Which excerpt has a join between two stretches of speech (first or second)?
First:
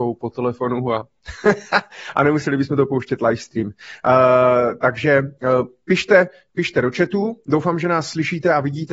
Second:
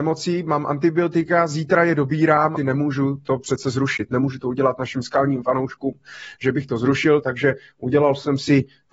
second